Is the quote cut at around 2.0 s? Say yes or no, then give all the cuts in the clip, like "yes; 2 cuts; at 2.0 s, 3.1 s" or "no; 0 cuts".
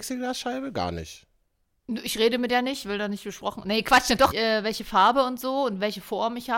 no; 1 cut; at 4.3 s